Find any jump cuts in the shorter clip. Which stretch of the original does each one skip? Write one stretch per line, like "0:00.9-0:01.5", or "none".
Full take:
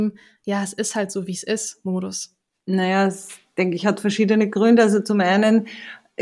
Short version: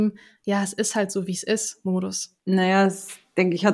0:02.4-0:02.6